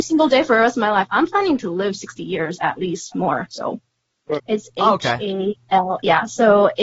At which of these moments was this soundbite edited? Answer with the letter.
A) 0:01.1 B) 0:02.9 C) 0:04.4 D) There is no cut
C